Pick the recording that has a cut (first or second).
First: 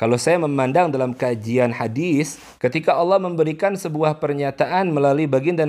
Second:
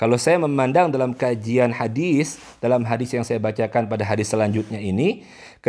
first